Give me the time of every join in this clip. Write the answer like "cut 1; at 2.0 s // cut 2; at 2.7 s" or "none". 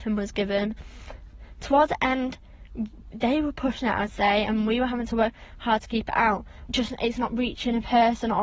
cut 1; at 3.1 s // cut 2; at 6.7 s